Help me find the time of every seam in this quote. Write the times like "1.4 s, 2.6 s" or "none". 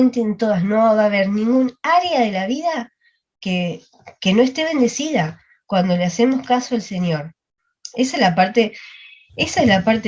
none

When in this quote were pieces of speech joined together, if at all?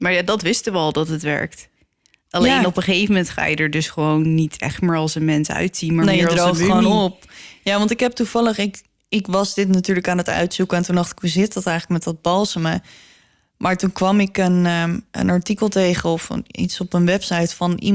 none

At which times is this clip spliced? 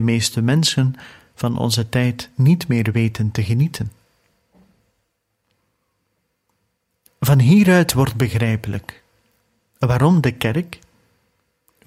none

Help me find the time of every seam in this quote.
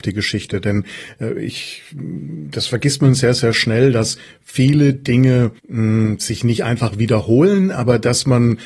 5.6 s

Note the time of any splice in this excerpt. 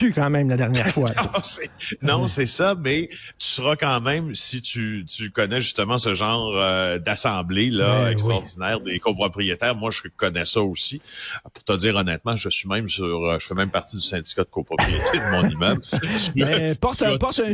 none

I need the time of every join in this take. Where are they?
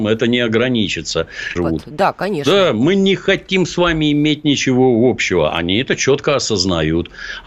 1.6 s

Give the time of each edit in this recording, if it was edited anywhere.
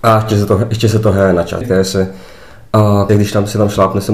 1.6 s, 3.1 s

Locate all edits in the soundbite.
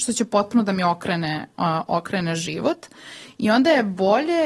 none

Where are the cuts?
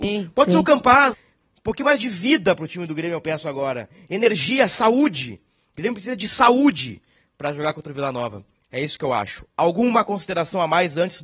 1.1 s

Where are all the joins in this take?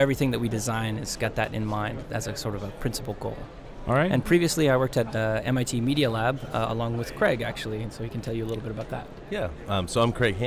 none

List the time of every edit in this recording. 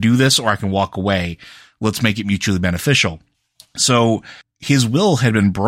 none

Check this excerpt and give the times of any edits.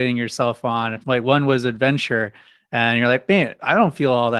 none

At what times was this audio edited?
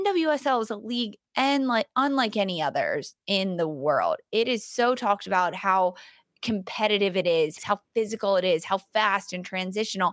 7.6 s

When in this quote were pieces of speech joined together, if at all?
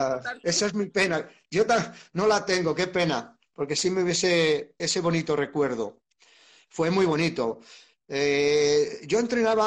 4.8 s

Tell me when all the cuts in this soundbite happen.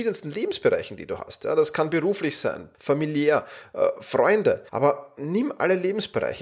2.7 s, 4.7 s

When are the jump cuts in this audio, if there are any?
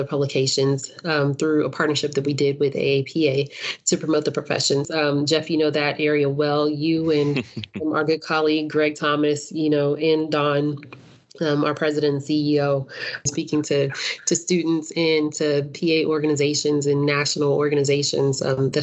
4.8 s

